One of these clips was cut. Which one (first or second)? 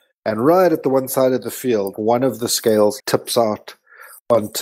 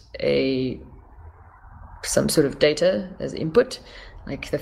first